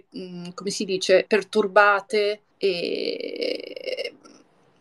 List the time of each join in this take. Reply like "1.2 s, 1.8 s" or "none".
1.3 s, 2.5 s

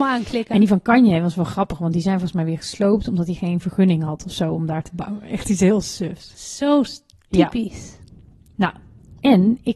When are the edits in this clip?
none

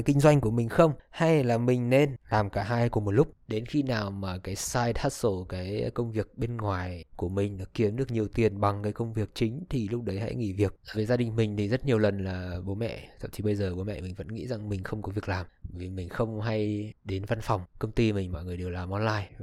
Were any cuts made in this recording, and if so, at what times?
10.9 s

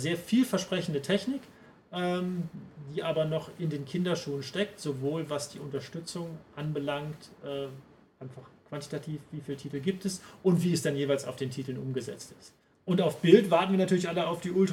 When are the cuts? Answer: 12.7 s

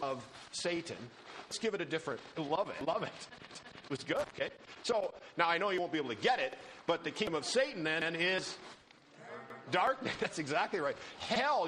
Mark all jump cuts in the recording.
2.3 s

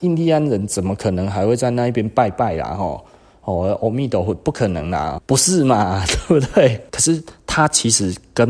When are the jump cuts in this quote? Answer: 5.2 s, 6.9 s

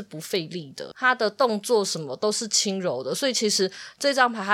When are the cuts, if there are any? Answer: 0.9 s

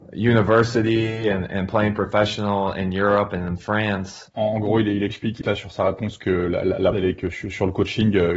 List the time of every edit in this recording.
4.3 s, 5.4 s, 6.9 s

